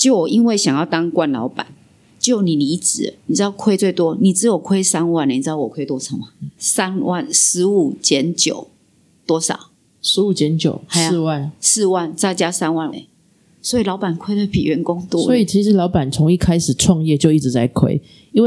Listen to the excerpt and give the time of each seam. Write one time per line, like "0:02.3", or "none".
0:12.9